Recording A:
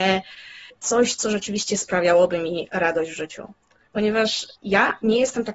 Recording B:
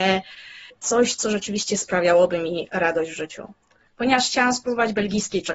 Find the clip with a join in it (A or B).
B